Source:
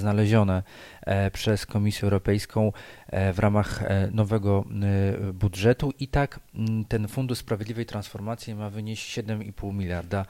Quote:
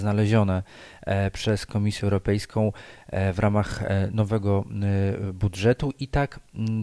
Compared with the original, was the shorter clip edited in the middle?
no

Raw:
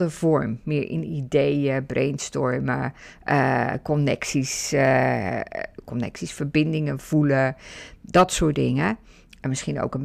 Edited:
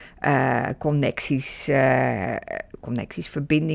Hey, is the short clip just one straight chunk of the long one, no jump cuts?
yes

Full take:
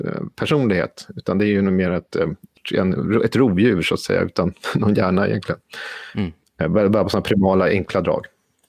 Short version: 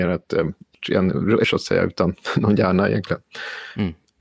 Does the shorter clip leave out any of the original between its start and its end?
yes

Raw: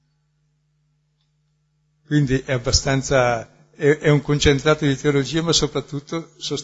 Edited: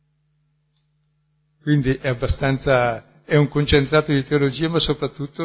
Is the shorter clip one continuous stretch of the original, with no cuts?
no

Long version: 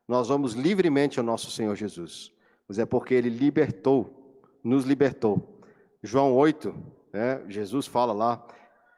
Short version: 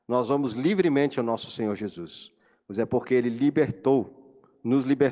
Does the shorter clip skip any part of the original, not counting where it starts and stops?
no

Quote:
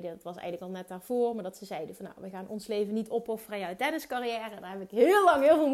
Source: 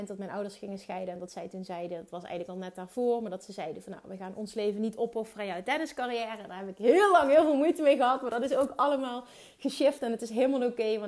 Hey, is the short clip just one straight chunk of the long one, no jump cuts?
yes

